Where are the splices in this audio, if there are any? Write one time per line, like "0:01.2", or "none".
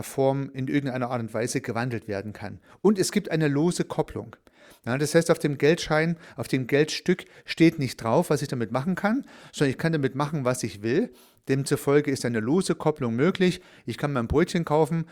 none